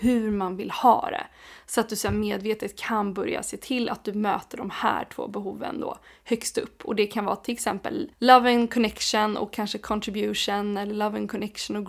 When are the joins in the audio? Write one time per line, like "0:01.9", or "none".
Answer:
0:08.1